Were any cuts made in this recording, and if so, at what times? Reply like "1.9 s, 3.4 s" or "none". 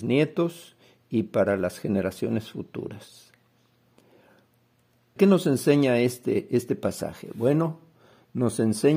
5.2 s